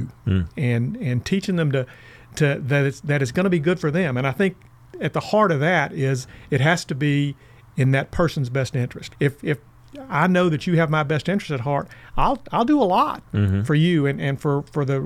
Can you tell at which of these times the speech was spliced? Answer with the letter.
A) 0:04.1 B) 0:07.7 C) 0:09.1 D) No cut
C